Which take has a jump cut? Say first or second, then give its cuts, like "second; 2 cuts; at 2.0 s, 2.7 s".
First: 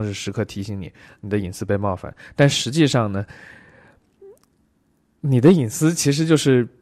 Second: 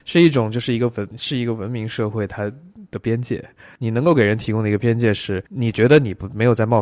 second; 1 cut; at 5.5 s